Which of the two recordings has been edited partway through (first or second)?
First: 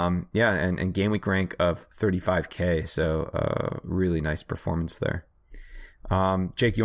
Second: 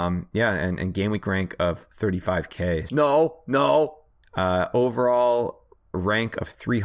second